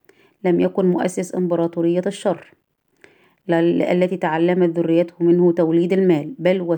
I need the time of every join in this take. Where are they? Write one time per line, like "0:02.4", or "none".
none